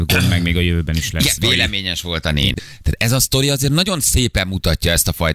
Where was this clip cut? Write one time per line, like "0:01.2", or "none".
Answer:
0:02.6

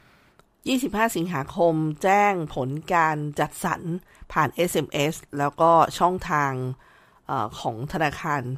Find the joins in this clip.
none

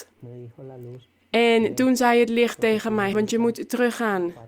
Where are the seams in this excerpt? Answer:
0:03.1

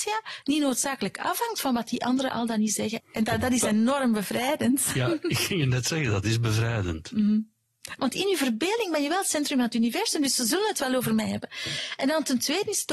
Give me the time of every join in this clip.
0:03.0
0:08.0

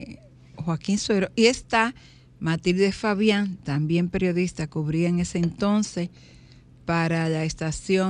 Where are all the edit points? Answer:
none

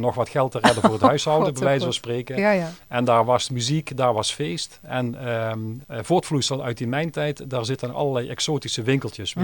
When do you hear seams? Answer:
0:05.8

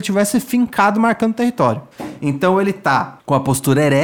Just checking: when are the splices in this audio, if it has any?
none

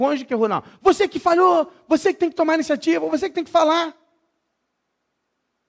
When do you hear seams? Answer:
none

